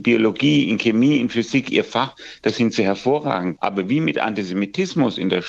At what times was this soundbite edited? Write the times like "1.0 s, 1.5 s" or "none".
3.6 s